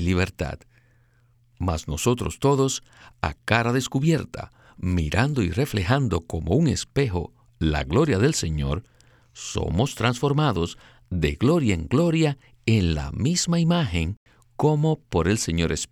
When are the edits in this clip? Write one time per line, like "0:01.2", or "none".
none